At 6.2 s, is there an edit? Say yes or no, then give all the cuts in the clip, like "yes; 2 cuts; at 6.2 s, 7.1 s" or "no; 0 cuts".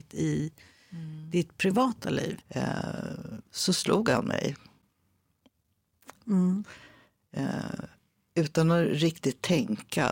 yes; 2 cuts; at 2.4 s, 6.2 s